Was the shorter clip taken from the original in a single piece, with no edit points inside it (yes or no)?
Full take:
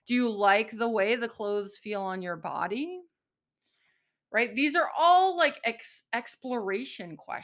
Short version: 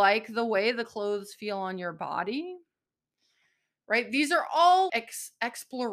no